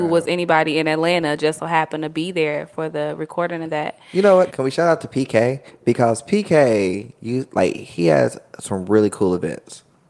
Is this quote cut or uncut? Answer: cut